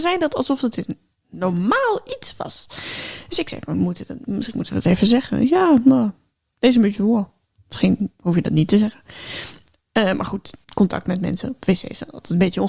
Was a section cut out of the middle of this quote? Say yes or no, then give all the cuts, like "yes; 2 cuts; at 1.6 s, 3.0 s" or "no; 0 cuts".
yes; 1 cut; at 10.6 s